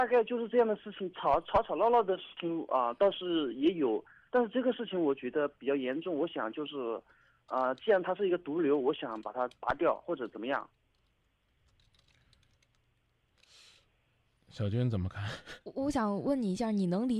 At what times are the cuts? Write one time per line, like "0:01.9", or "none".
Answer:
0:15.6